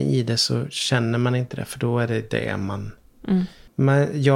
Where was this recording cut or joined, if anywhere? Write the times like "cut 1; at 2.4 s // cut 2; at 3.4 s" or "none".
none